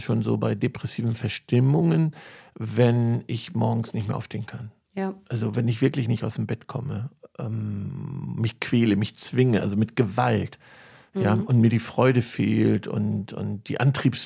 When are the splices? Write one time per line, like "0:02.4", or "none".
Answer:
none